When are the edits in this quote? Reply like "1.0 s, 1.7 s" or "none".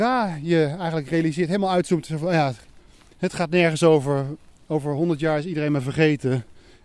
none